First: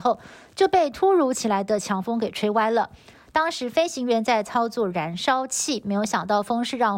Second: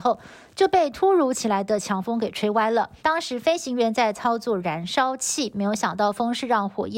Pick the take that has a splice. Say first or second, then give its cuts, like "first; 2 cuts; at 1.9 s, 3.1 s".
second; 1 cut; at 3.0 s